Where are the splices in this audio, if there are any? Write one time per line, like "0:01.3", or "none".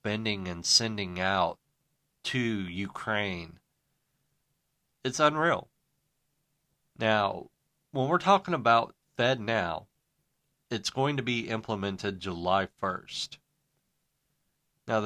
0:06.8